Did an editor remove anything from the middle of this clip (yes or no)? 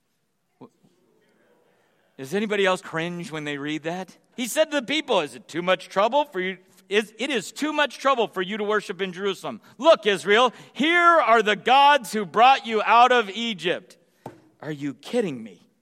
yes